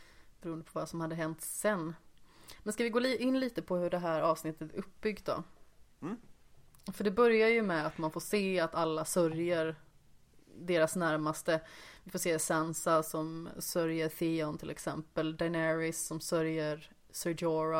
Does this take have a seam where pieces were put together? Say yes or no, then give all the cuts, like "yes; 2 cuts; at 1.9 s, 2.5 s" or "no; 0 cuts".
no; 0 cuts